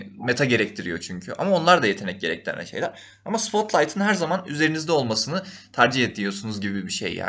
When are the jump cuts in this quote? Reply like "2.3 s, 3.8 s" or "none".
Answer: none

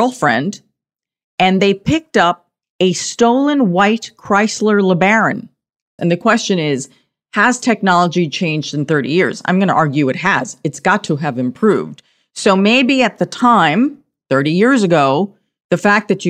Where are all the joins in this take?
6.0 s

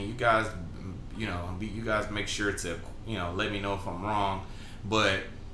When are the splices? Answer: none

